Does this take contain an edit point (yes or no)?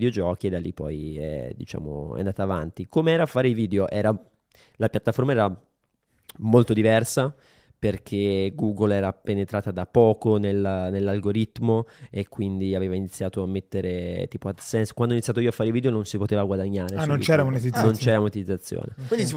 no